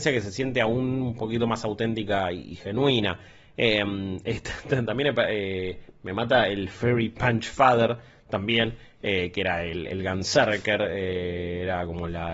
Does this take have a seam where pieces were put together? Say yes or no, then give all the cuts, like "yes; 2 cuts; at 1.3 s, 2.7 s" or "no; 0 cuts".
no; 0 cuts